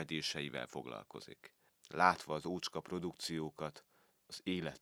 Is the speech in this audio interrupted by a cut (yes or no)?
yes